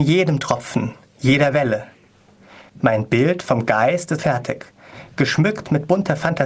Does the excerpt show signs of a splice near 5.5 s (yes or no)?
no